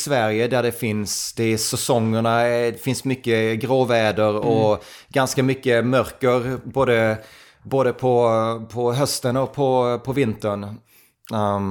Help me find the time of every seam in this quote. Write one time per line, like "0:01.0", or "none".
none

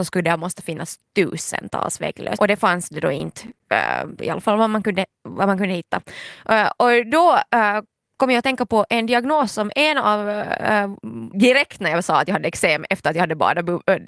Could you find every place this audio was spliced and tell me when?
0:02.4
0:11.3

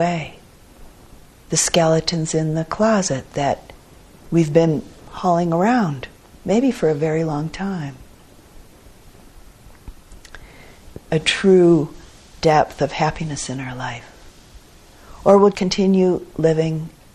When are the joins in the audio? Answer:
0:06.4
0:11.1
0:15.5

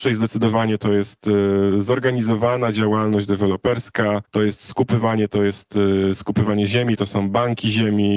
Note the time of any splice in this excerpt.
none

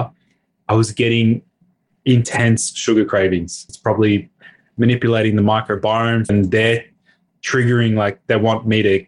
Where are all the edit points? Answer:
0:03.7
0:06.3

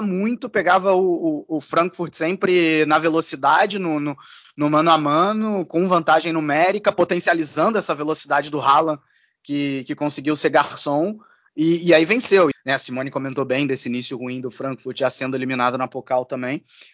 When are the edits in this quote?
0:12.5

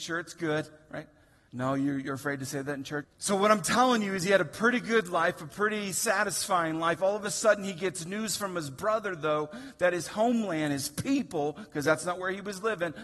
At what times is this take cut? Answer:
0:01.5
0:03.0

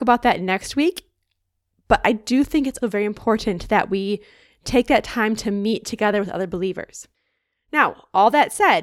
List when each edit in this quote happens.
0:02.8

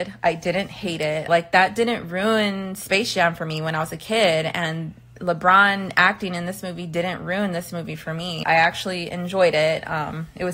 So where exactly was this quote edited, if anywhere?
0:01.3
0:08.4

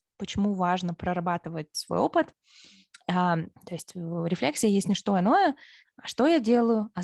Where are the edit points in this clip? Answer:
0:03.5
0:05.8

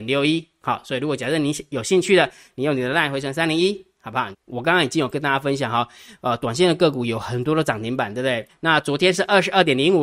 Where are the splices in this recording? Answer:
0:04.3
0:08.5

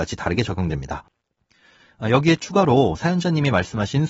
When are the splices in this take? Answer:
none

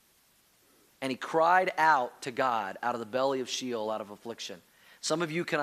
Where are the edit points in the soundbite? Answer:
none

